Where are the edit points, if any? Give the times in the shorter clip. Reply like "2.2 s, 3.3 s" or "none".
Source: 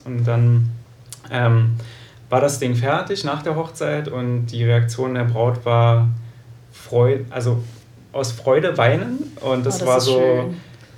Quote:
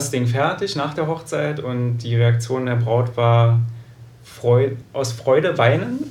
4.8 s